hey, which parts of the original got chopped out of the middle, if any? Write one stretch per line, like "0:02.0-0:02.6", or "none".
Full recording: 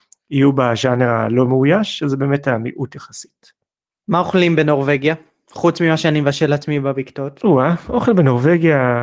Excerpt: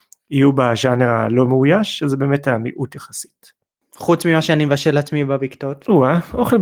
0:03.8-0:05.4